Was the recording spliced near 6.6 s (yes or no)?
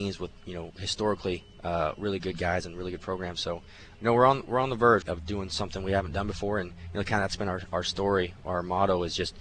no